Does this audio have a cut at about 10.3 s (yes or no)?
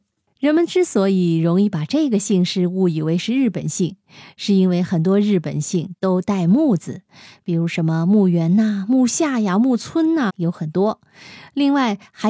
yes